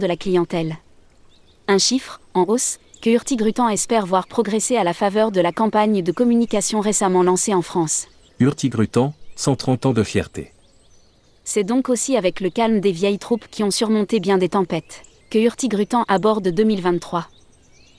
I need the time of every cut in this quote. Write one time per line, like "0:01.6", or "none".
0:08.3
0:15.2